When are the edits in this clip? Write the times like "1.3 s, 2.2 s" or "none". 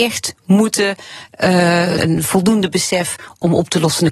2.0 s

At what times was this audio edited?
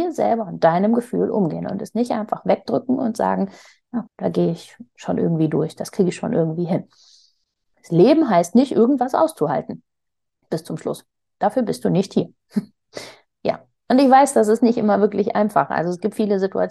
4.1 s

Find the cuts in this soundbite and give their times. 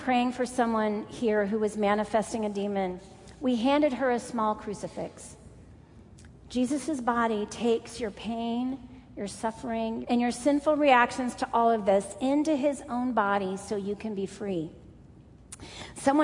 10.0 s

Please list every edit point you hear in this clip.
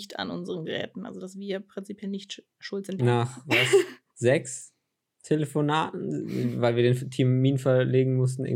3.0 s

